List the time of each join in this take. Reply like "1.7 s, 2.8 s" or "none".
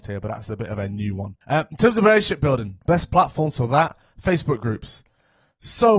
1.4 s, 2.8 s

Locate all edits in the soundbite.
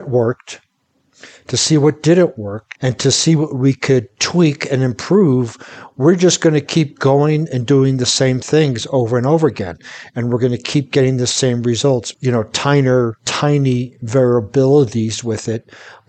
2.8 s, 12.1 s, 13.2 s

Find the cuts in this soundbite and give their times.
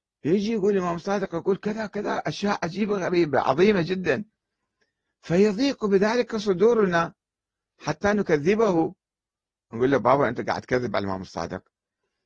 none

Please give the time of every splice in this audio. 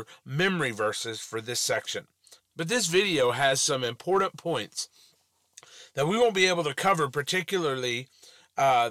2.4 s

